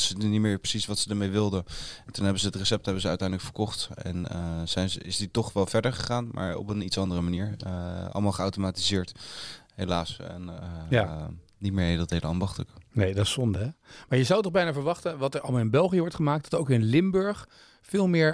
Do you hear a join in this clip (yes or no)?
no